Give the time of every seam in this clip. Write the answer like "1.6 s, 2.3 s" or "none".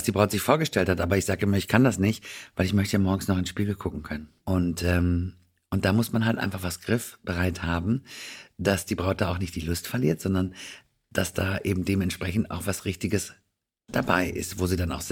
4.4 s

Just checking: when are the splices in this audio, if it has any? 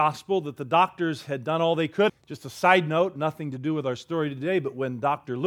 2.1 s

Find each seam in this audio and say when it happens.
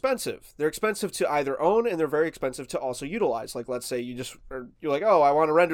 4.7 s

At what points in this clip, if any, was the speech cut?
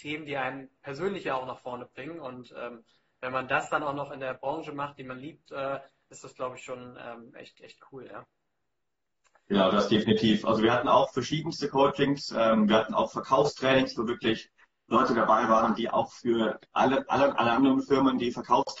none

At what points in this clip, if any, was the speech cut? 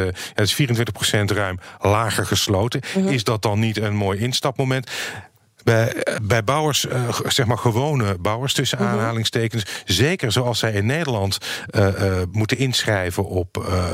6.2 s

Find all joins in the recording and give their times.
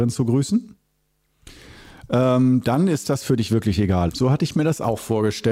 4.1 s

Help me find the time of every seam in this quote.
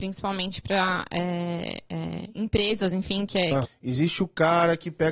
3.6 s

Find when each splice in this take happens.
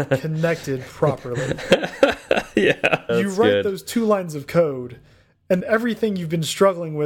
3.1 s, 5.6 s

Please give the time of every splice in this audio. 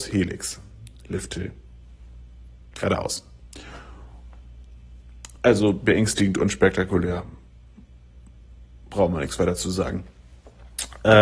none

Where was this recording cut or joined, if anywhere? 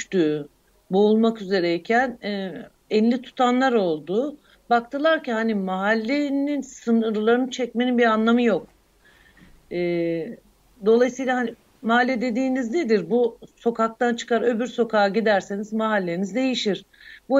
none

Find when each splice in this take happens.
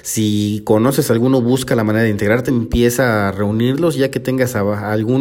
2.5 s

